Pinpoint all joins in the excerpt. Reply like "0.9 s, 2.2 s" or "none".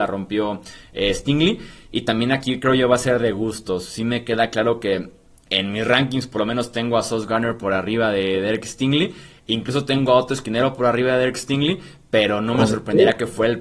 none